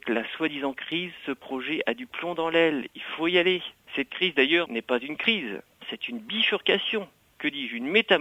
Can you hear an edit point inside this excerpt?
no; 0 cuts

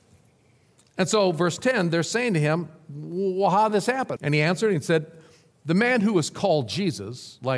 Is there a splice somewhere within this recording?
yes; 1 cut; at 4.2 s

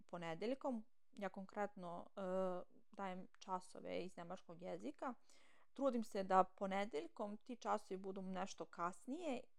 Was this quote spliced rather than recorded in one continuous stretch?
no; 0 cuts

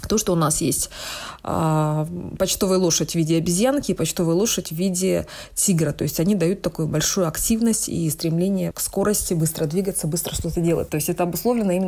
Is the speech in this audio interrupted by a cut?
yes; 2 cuts; at 8.7 s, 10.9 s

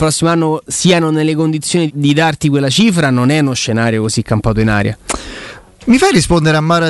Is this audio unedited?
no; 1 cut; at 1.9 s

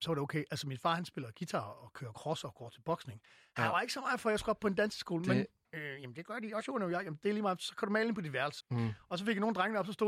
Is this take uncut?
no; 2 cuts; at 5.6 s, 8.6 s

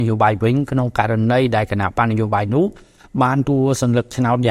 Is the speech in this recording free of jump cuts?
no; 1 cut; at 3.4 s

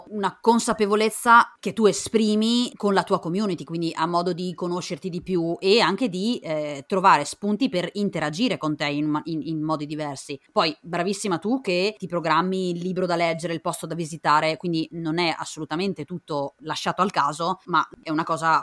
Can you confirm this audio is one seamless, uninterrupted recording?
yes; 0 cuts

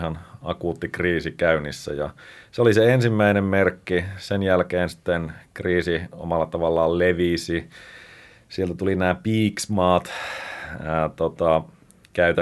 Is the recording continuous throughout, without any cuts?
yes; 0 cuts

